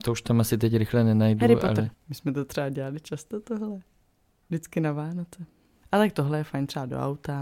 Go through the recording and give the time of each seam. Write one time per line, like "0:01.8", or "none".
0:01.9
0:05.8